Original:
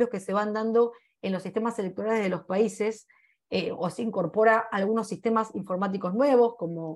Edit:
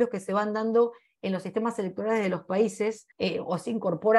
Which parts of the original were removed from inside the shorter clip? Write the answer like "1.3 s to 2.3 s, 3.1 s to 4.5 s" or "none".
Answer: 3.1 s to 3.4 s